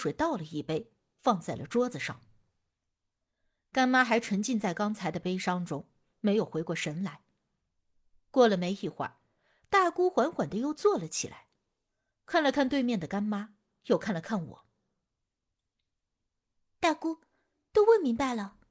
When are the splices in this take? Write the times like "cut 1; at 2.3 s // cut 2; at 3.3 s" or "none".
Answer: none